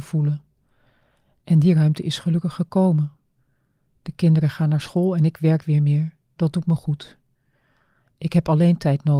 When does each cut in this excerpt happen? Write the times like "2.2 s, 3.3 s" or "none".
none